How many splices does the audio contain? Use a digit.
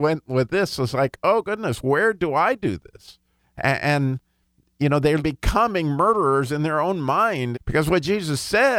3